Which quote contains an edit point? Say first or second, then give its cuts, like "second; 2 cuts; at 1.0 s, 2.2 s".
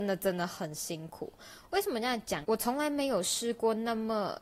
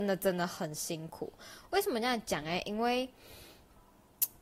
first; 1 cut; at 2.4 s